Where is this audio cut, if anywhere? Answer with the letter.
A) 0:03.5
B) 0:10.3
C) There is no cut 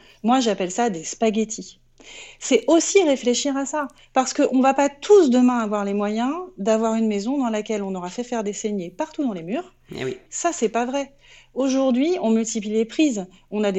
B